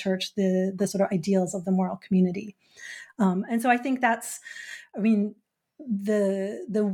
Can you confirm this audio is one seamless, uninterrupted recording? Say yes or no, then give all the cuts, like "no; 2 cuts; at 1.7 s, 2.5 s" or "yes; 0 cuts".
yes; 0 cuts